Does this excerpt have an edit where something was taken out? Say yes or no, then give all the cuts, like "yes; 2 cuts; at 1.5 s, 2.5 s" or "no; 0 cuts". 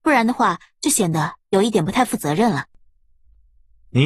no; 0 cuts